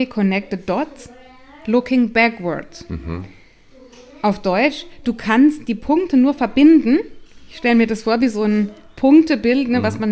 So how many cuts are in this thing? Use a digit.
0